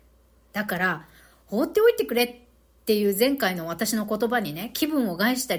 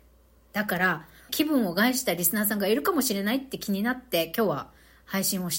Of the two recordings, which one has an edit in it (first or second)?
second